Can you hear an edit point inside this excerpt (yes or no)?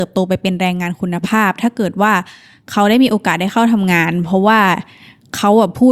no